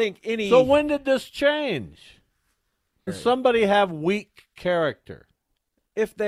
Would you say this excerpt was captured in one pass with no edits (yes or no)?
no